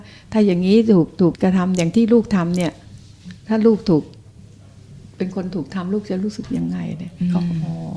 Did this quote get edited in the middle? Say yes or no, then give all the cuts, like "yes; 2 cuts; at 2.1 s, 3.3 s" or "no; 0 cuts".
yes; 1 cut; at 1.3 s